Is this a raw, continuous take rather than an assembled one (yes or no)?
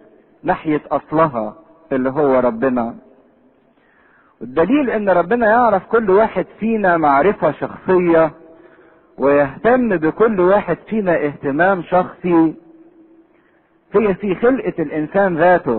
yes